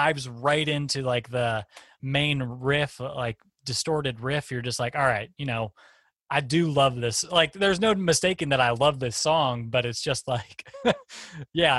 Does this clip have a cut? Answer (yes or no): no